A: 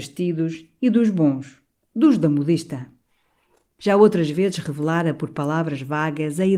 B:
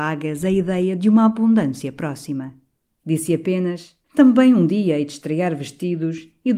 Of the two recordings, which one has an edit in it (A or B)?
B